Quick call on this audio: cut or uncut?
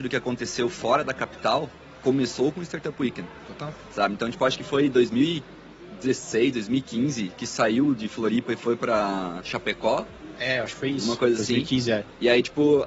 uncut